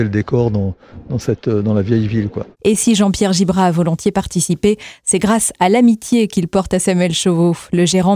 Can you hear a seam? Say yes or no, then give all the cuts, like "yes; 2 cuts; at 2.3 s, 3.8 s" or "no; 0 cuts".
no; 0 cuts